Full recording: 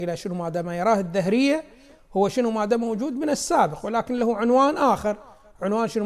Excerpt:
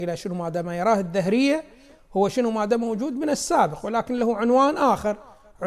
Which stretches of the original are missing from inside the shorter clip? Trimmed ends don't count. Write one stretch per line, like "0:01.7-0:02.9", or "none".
none